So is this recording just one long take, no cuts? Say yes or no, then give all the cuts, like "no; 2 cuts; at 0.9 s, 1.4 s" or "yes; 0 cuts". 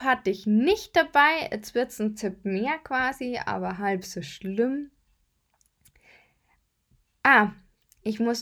yes; 0 cuts